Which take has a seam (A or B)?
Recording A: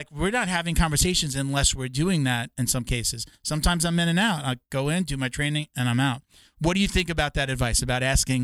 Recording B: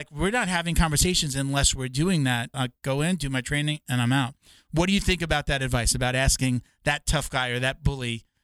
B